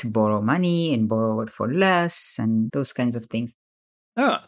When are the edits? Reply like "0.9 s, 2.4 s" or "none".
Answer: 2.7 s